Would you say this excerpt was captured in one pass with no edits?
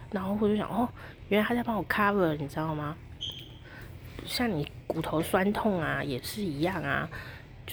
yes; 0 cuts

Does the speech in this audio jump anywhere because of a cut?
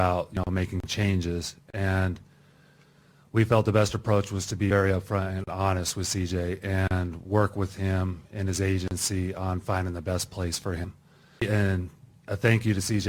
yes; 1 cut; at 11.4 s

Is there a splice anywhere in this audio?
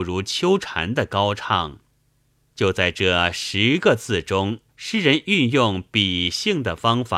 yes; 2 cuts; at 2.5 s, 4.7 s

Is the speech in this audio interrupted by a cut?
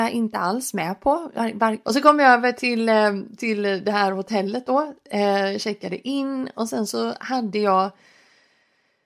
yes; 1 cut; at 1.8 s

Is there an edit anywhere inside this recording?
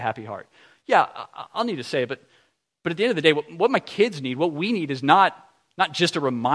no; 0 cuts

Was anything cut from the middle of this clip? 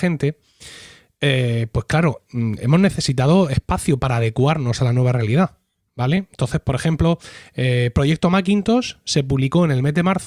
no; 0 cuts

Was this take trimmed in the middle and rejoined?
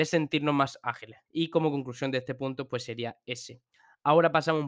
yes; 1 cut; at 1.3 s

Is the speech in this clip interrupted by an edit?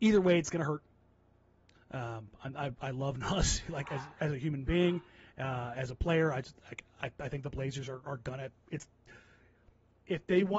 yes; 1 cut; at 1.7 s

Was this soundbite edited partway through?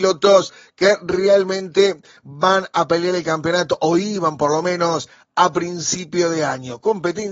no; 0 cuts

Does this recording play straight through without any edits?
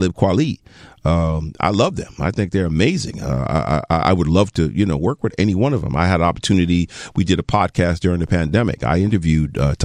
yes; 0 cuts

